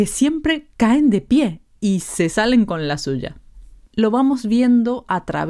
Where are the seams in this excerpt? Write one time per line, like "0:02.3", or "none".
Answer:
0:03.9